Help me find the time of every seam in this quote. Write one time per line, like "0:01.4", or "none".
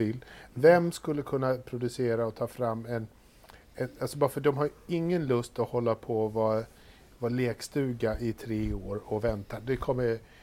none